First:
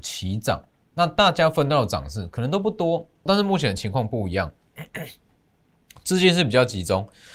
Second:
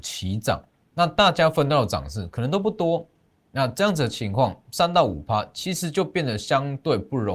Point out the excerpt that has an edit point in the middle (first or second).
first